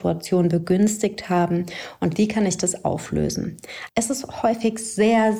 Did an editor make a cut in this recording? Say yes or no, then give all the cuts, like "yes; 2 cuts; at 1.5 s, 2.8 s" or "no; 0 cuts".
yes; 1 cut; at 3.9 s